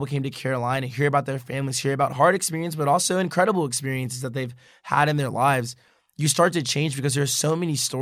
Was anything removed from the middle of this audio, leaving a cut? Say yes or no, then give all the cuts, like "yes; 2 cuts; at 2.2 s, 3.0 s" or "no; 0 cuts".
no; 0 cuts